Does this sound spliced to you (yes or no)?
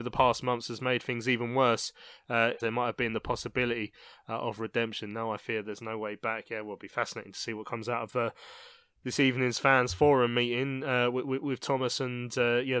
yes